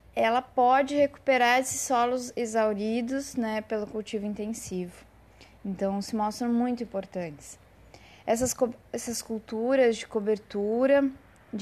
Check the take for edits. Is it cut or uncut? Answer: uncut